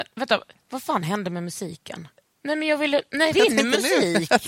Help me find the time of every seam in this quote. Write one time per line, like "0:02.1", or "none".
0:02.3
0:03.3